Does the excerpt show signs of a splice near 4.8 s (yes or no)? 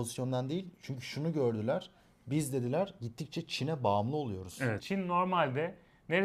yes